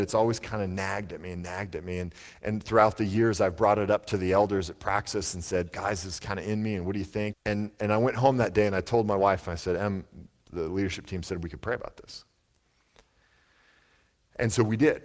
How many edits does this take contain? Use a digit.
1